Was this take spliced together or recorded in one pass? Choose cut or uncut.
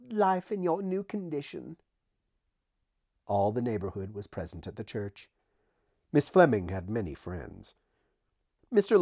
uncut